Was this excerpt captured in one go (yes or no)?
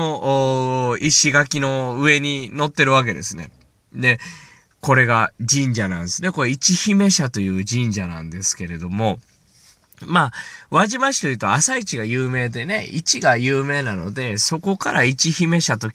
yes